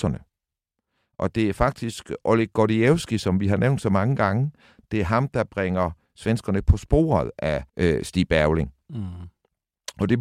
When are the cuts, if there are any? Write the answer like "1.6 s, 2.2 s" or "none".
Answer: 7.7 s

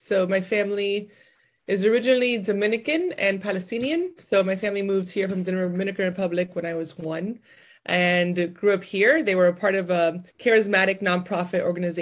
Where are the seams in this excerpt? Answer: 10.3 s

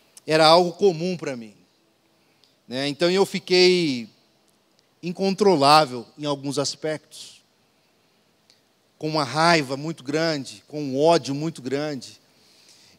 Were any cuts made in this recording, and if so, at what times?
none

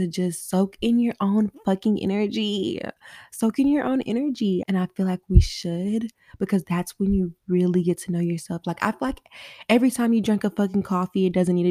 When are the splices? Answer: 4.6 s, 8.6 s

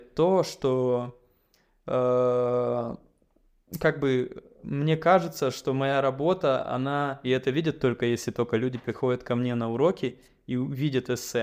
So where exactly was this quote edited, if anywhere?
7.2 s

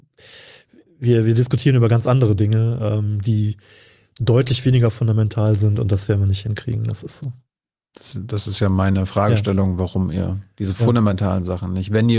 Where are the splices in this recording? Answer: none

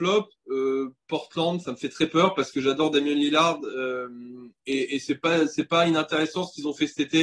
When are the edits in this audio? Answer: none

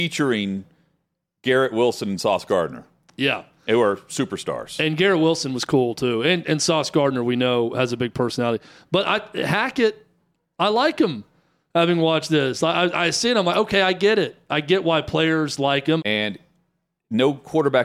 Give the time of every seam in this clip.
16.0 s

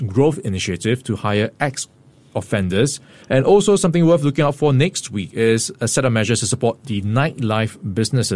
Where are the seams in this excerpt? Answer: 3.2 s

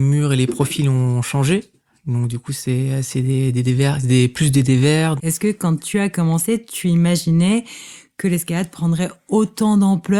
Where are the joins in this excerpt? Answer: 5.2 s

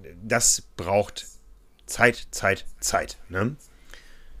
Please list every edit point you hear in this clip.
none

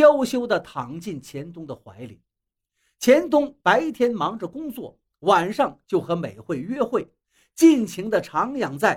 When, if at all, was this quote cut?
none

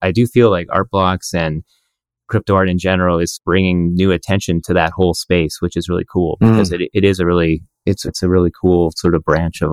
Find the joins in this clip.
none

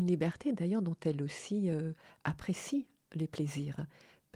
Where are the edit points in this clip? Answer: none

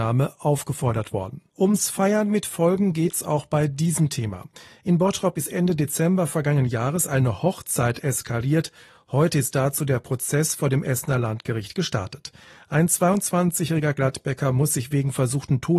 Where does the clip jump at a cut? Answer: 1.5 s

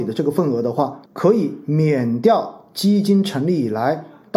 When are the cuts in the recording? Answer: 1.1 s

